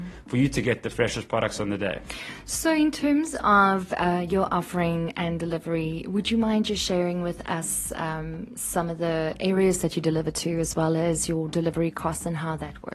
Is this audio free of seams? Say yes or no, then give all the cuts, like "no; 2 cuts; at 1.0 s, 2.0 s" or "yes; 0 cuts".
yes; 0 cuts